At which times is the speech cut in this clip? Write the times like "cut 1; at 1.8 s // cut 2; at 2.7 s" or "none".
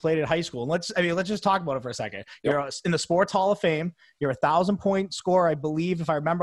none